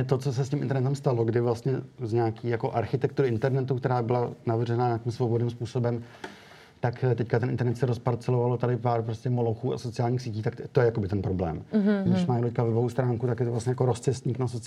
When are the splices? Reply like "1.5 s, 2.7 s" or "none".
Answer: 12.1 s